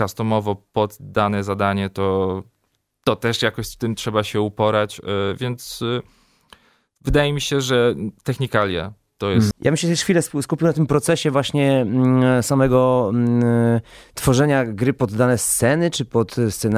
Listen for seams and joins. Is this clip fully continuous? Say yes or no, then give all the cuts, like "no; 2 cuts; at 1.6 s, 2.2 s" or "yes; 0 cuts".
no; 1 cut; at 9.5 s